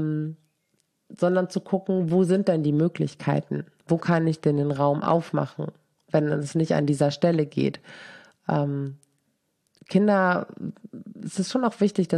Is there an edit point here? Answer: no; 0 cuts

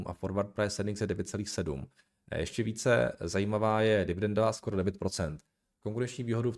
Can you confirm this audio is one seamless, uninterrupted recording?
yes; 0 cuts

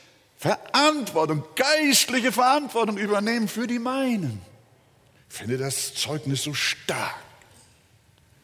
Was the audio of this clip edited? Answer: yes; 1 cut; at 5.2 s

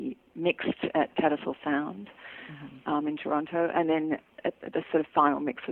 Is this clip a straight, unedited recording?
yes; 0 cuts

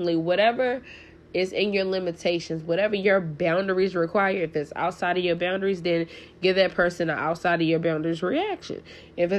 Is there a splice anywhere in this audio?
no; 0 cuts

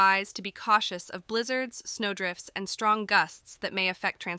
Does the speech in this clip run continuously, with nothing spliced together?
yes; 0 cuts

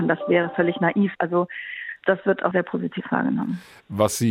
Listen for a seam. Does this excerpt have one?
yes; 2 cuts; at 1.1 s, 2.5 s

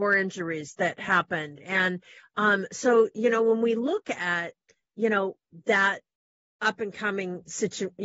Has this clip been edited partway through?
no; 0 cuts

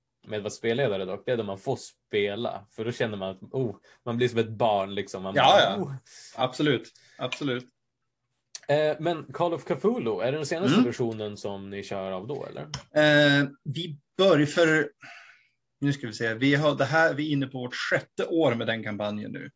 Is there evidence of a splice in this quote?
no; 0 cuts

